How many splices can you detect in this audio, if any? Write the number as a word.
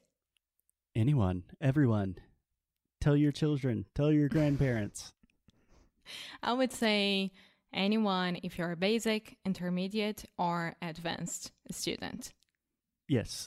zero